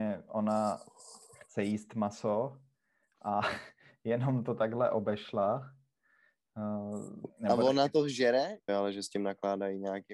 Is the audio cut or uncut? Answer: cut